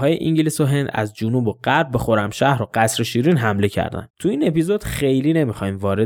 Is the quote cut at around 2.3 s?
no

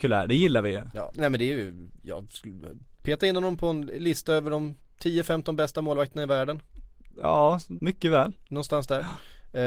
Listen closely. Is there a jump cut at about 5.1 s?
no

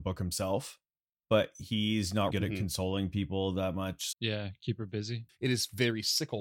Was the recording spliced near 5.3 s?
yes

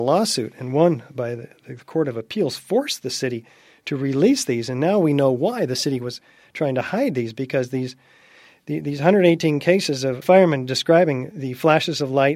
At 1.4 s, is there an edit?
no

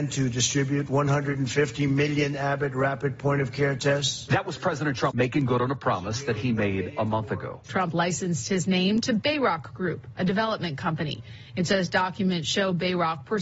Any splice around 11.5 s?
no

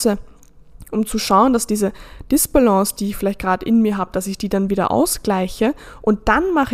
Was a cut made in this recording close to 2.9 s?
no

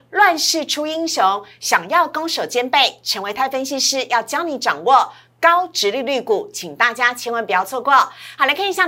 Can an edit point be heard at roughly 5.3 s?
no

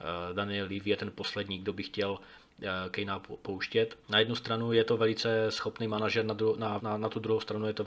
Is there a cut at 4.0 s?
yes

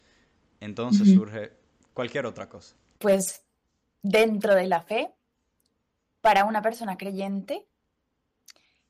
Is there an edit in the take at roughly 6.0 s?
no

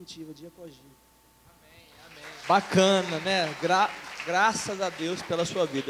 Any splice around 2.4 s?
yes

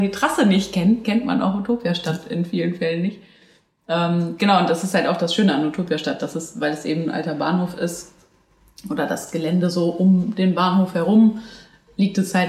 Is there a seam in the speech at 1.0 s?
yes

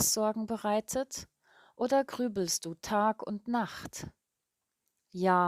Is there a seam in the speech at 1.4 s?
no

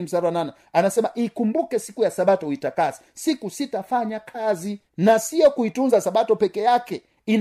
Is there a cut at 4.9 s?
yes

